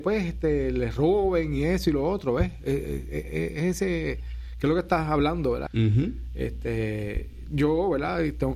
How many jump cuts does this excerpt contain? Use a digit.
2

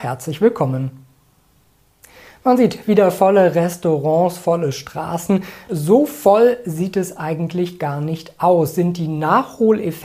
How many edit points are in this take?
1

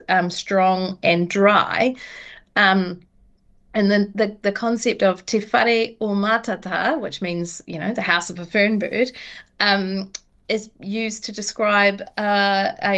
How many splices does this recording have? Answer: 0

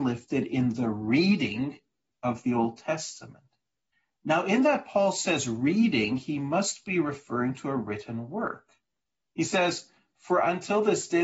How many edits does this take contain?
0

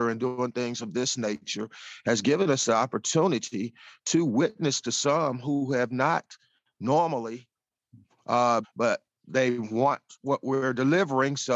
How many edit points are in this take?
1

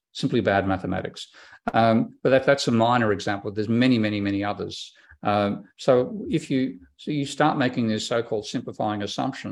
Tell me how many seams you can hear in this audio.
0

